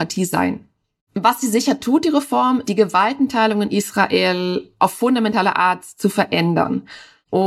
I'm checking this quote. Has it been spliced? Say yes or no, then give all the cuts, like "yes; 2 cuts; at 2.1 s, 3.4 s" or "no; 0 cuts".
yes; 2 cuts; at 1.0 s, 2.6 s